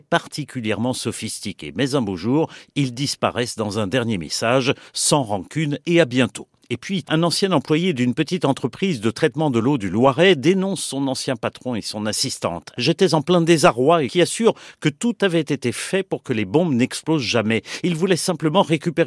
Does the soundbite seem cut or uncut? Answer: cut